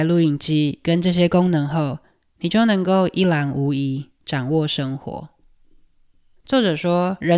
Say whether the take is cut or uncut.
uncut